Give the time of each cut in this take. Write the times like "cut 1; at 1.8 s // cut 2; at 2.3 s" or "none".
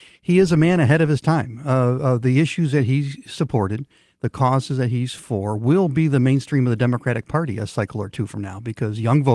none